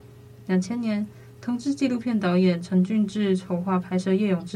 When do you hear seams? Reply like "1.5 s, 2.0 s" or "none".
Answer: none

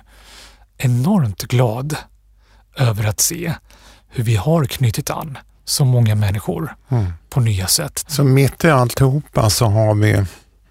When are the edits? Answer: 8.0 s

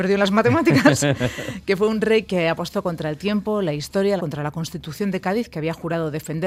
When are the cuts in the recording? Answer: 4.2 s

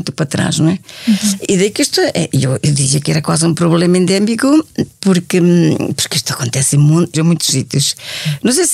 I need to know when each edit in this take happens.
7.1 s

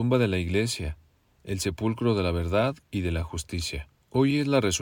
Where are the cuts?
none

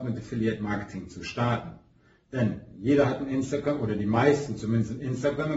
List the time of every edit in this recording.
none

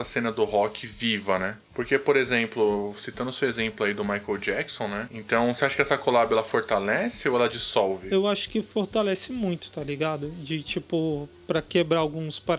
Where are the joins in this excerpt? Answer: 5.1 s

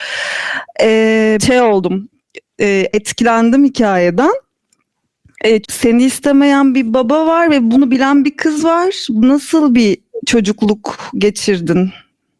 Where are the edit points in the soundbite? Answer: 1.4 s, 5.6 s

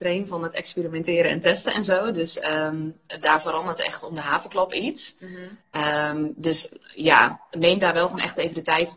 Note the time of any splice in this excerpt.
none

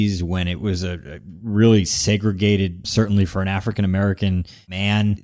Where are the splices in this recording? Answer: 2.8 s

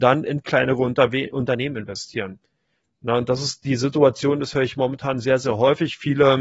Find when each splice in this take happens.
none

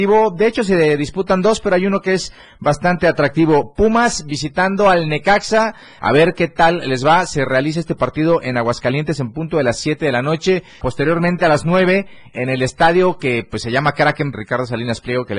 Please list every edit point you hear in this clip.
6.0 s, 10.8 s, 14.3 s

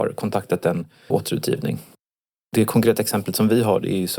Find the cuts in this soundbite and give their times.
1.1 s

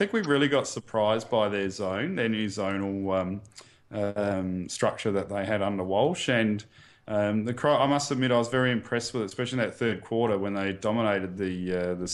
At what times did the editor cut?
none

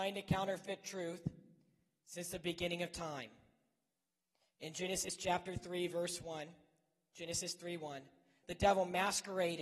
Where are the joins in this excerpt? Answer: 8.4 s

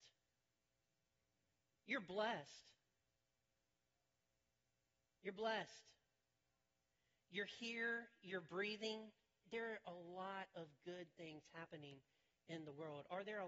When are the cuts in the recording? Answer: 9.4 s

